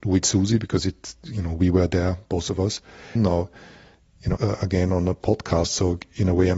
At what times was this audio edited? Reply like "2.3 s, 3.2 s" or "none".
3.2 s, 4.4 s

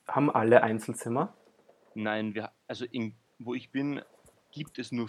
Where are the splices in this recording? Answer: none

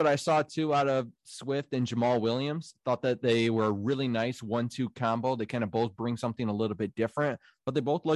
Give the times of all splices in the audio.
none

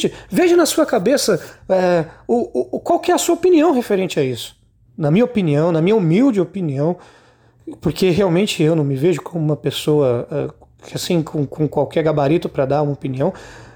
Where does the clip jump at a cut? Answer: 4.8 s

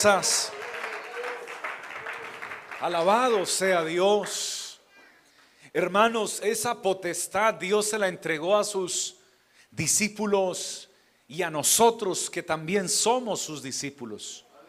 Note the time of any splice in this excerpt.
6.4 s

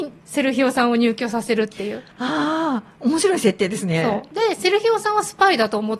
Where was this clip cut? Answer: 2.1 s

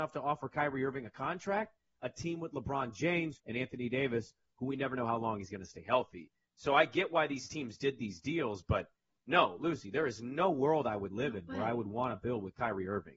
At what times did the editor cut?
3.3 s

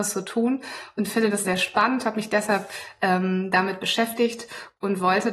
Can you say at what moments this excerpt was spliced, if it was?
1.4 s

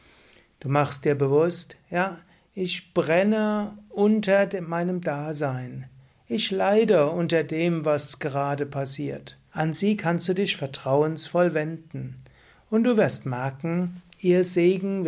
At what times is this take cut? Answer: 9.5 s

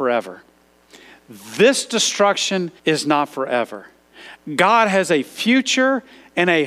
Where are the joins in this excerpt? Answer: 2.8 s

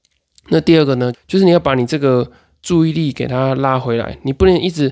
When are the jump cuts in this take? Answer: 1.1 s

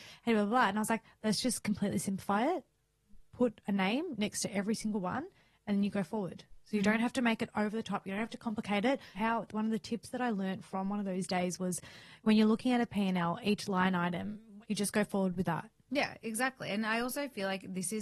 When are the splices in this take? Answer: 9.1 s, 14.6 s

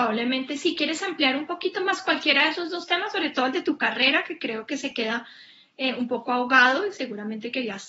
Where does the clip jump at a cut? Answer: none

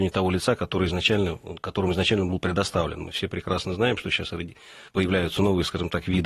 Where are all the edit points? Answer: 4.9 s

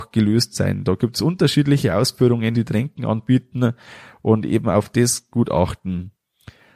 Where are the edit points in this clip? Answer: 2.5 s, 5.3 s

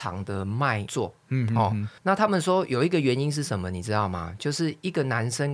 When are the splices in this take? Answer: 2.0 s

